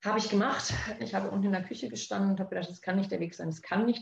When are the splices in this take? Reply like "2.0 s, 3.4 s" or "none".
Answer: 1.0 s